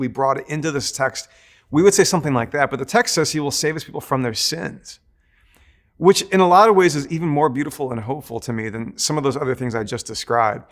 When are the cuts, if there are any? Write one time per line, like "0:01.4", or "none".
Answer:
none